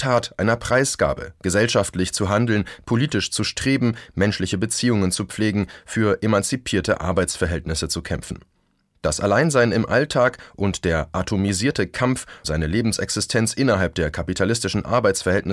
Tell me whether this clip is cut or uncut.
cut